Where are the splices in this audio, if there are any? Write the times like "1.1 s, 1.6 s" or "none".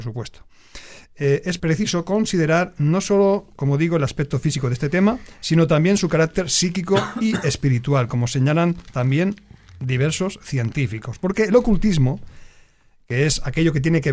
1.6 s